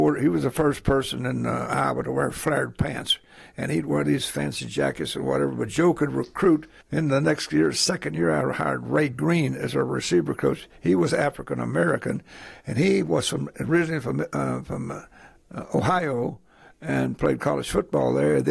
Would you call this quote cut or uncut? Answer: cut